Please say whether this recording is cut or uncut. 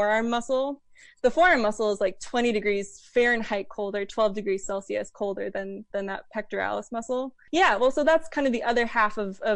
cut